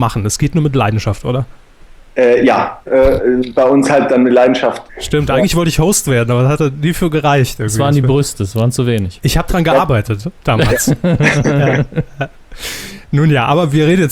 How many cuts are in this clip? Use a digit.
2